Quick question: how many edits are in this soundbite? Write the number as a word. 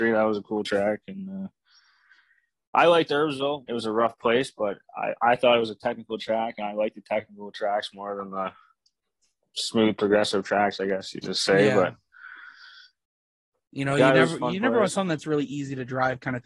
one